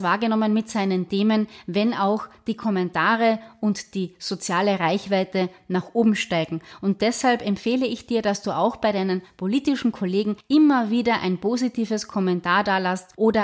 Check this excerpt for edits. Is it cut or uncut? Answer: uncut